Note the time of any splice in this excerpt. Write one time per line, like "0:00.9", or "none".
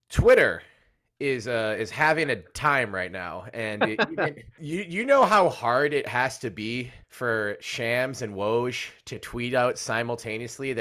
0:04.6
0:07.0